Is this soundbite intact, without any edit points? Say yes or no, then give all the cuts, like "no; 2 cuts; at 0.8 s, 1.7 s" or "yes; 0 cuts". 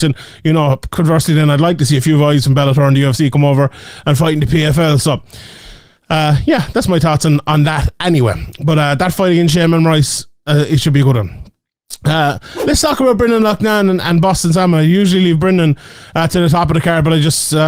yes; 0 cuts